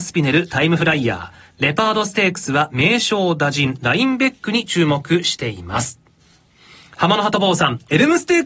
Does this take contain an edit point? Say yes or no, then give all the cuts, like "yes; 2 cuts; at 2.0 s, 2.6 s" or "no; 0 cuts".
no; 0 cuts